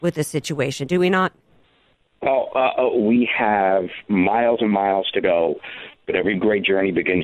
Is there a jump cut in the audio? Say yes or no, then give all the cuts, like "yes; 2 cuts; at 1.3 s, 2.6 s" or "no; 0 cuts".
no; 0 cuts